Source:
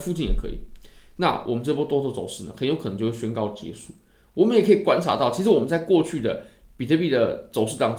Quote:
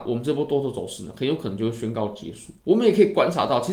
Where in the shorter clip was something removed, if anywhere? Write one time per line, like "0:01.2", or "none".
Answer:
0:02.6